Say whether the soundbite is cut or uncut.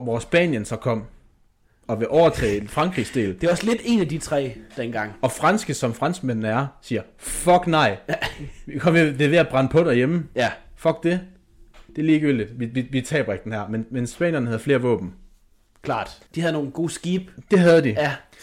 cut